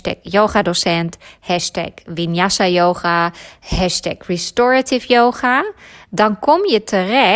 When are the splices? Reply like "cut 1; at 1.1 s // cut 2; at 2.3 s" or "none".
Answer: none